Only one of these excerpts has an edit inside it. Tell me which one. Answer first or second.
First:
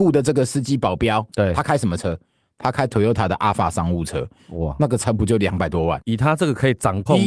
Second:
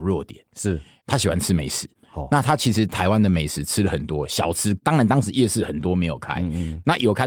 first